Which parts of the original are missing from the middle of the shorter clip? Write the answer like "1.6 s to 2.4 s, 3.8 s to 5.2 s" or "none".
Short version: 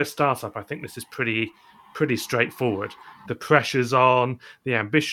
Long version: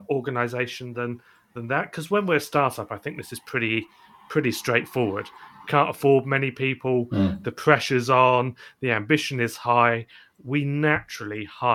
5.6 s to 7.4 s